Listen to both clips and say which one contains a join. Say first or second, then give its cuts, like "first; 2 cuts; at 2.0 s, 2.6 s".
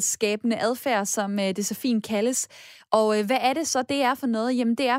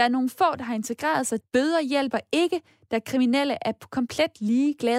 second; 1 cut; at 1.4 s